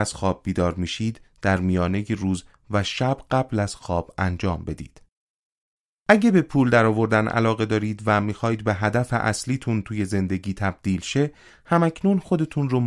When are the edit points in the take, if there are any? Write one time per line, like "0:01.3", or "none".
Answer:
0:05.9